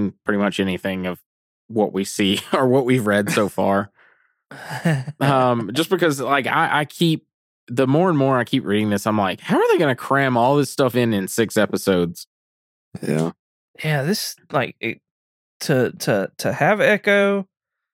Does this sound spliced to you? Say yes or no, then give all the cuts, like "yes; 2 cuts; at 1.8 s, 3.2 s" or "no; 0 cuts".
no; 0 cuts